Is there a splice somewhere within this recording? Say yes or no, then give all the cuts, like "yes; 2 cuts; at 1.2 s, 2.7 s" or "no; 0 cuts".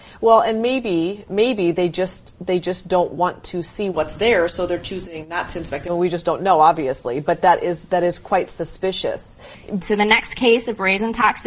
yes; 1 cut; at 9.8 s